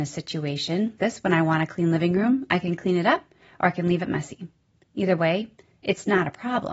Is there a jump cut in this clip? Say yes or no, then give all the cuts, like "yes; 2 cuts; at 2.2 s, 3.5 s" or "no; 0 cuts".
yes; 1 cut; at 1.0 s